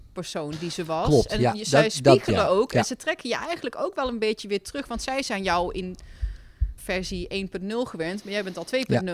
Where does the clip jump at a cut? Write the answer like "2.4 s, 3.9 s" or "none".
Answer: 6.8 s